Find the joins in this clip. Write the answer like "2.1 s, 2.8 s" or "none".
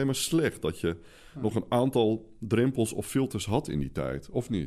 none